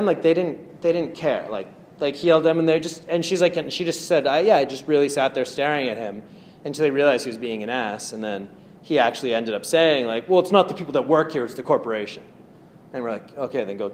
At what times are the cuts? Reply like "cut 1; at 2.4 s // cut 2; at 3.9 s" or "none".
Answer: none